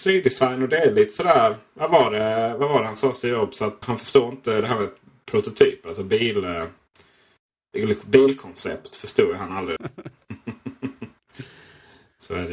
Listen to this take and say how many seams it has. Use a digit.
2